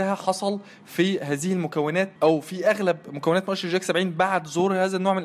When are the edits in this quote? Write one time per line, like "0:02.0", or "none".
0:02.2